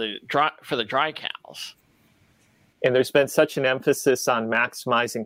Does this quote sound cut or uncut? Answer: cut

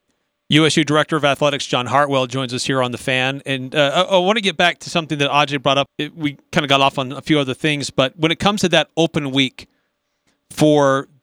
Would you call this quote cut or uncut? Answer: cut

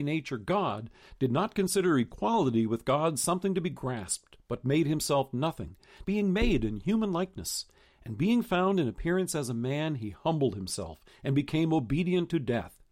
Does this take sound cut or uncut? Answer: cut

